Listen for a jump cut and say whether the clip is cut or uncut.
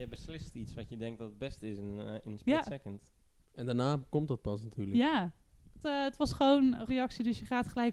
cut